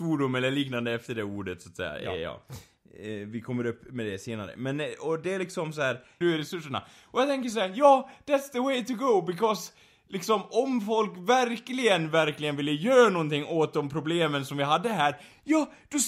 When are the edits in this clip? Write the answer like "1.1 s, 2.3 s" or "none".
6.2 s